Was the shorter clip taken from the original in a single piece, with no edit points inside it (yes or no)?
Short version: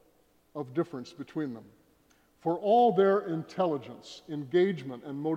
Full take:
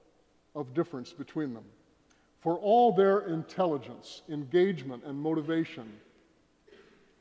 yes